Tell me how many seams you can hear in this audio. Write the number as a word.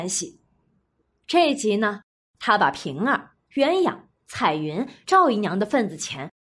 two